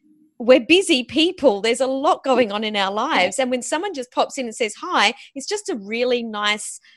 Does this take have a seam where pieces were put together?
no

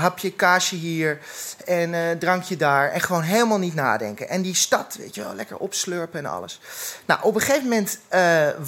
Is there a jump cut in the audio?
no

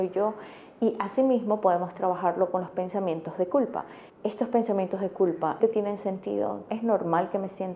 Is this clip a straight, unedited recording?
no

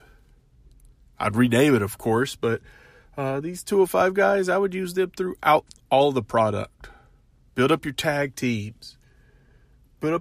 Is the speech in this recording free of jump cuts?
yes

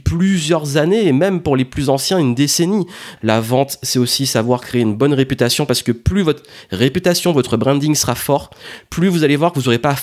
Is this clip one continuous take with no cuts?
no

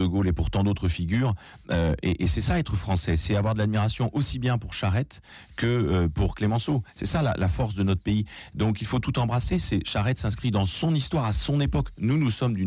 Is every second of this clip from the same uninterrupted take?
yes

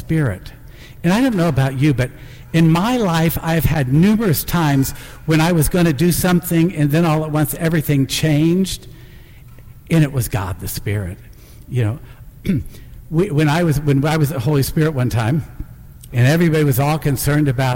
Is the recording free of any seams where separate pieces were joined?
no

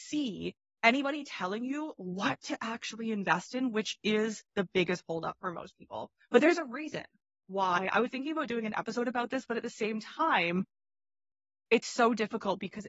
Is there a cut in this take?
no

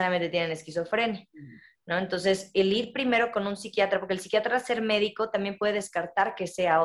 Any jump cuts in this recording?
no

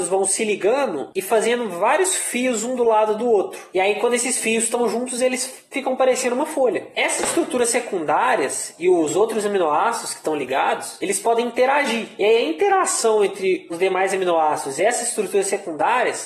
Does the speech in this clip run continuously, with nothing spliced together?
yes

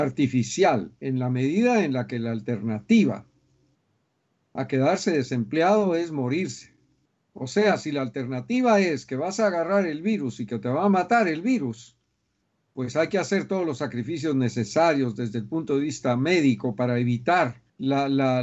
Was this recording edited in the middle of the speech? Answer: no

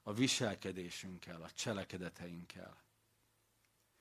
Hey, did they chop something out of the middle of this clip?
no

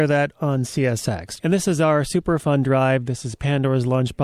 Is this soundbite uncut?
no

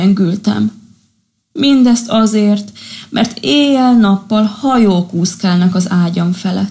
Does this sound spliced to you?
no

